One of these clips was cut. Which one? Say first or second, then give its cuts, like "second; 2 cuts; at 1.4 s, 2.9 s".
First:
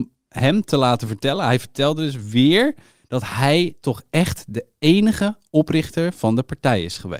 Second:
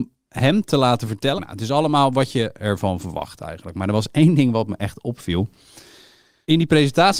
second; 1 cut; at 1.4 s